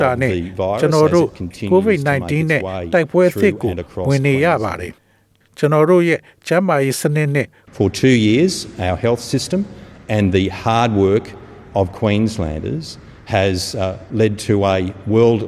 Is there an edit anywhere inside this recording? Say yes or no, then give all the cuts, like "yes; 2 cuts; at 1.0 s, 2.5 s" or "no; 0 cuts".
yes; 2 cuts; at 7.7 s, 14.1 s